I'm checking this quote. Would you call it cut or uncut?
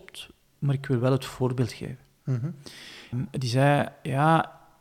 cut